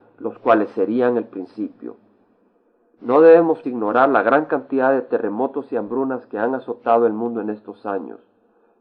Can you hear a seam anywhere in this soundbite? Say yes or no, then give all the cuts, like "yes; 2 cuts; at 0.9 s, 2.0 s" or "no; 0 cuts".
yes; 1 cut; at 3.6 s